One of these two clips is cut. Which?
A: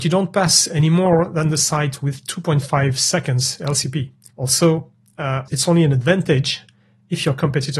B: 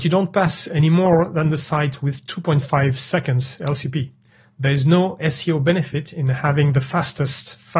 A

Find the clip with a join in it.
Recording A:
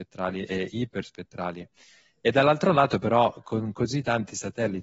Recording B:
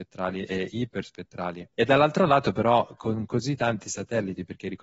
B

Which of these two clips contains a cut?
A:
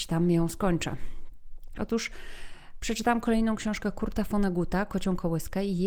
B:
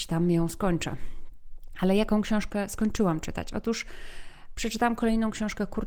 A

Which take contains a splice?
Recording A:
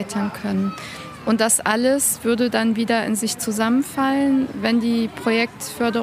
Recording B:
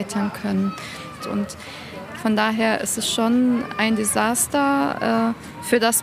B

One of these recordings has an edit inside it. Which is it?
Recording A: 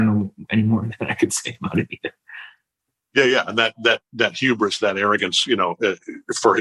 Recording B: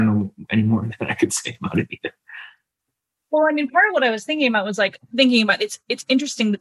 A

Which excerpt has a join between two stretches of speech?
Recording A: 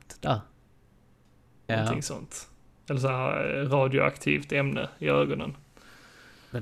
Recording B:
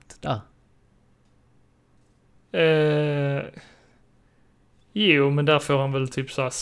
A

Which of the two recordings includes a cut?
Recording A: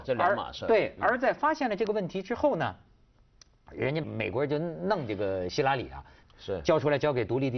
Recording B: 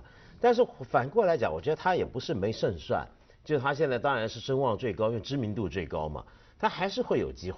A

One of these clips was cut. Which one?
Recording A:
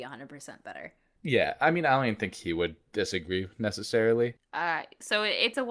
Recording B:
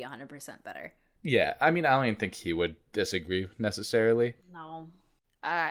A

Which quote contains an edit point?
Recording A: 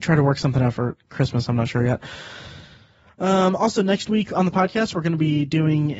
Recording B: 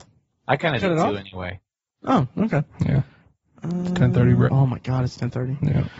B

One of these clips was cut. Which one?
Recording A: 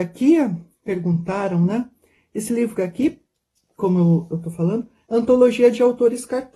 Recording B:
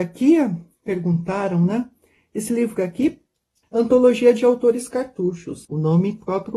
B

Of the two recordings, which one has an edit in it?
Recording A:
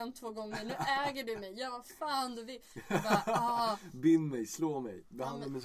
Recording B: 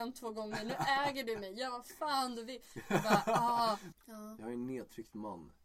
B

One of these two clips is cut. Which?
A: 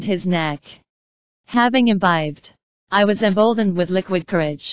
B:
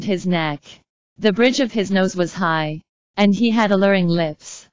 B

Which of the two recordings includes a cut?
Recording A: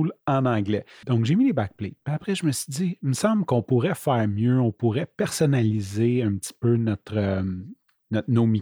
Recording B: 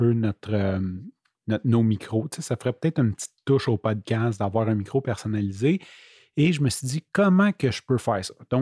A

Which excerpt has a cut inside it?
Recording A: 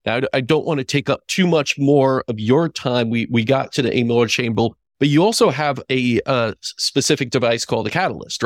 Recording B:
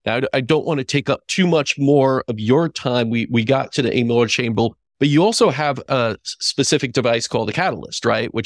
B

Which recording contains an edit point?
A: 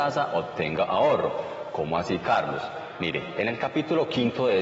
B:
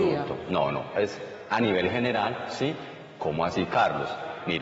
B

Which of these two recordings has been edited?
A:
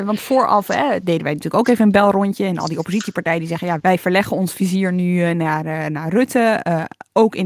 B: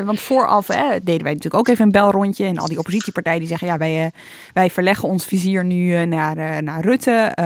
A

